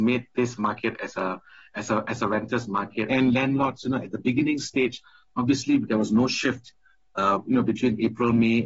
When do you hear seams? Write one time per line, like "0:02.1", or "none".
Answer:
0:03.1